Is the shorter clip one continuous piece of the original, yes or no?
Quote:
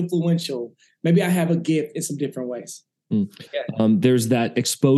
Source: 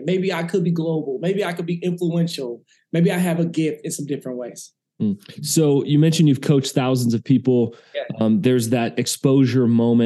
no